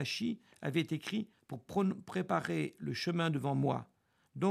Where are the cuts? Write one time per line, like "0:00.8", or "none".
0:01.3